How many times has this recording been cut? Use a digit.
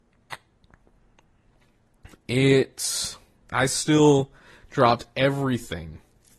1